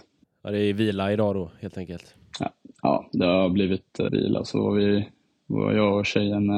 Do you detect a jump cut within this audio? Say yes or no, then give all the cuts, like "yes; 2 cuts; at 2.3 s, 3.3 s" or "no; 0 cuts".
yes; 1 cut; at 4.1 s